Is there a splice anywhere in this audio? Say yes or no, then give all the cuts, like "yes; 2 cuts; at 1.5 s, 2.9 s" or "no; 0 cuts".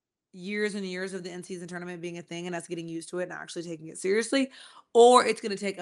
no; 0 cuts